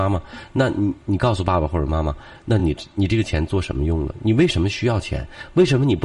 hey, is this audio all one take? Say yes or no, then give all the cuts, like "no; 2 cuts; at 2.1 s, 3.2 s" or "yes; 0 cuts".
yes; 0 cuts